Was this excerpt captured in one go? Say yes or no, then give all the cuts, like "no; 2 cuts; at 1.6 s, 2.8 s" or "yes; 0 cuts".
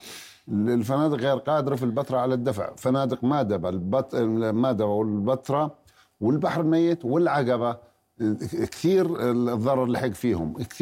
yes; 0 cuts